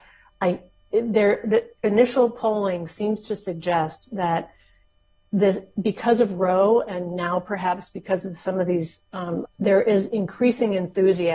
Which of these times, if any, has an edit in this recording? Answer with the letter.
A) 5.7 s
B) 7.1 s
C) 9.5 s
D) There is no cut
C